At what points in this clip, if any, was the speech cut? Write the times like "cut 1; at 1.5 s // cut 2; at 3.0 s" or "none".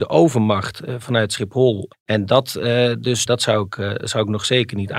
cut 1; at 1.9 s // cut 2; at 3.3 s

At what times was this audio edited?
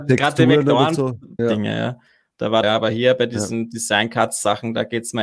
cut 1; at 1.4 s // cut 2; at 2.6 s

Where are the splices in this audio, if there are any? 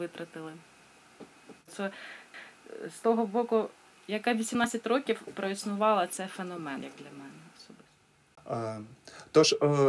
cut 1; at 1.7 s // cut 2; at 3.9 s

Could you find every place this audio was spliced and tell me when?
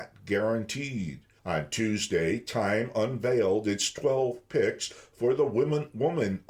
cut 1; at 1.4 s

